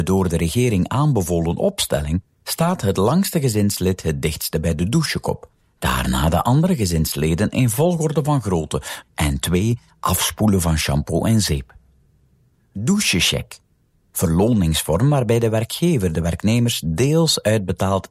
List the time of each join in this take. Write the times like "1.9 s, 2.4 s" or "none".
9.0 s

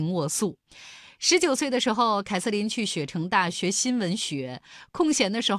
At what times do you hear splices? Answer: 3.5 s

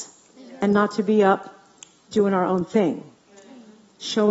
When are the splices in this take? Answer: none

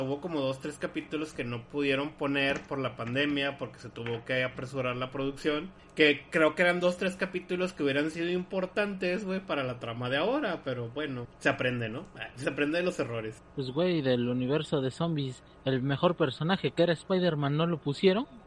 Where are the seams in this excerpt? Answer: none

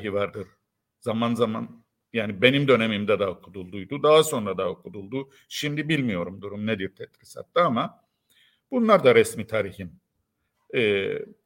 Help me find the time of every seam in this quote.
none

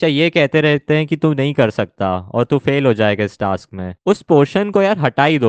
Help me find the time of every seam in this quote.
4.0 s

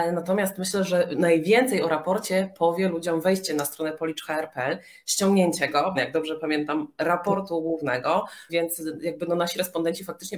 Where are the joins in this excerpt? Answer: 5.9 s, 8.5 s

